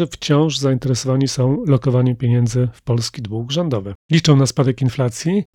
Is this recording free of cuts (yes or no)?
no